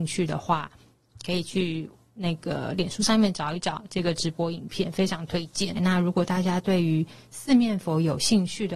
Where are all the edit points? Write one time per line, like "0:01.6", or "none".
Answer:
0:05.8